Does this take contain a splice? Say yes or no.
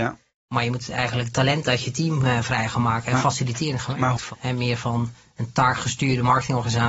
yes